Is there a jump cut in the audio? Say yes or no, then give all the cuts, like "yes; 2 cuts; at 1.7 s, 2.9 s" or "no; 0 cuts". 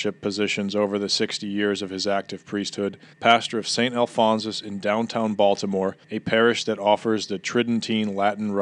yes; 2 cuts; at 3.1 s, 6.0 s